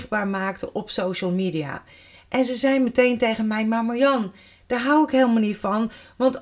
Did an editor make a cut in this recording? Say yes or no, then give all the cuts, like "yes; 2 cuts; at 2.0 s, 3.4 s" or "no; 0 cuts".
no; 0 cuts